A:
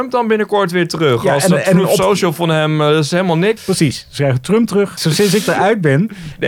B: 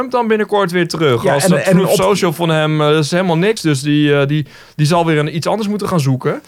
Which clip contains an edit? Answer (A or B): A